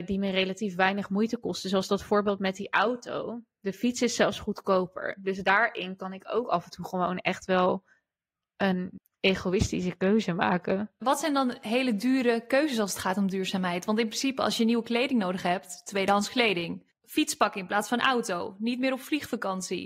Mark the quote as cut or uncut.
uncut